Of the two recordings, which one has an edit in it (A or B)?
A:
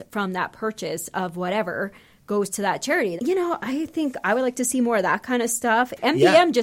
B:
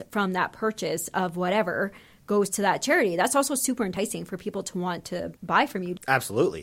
A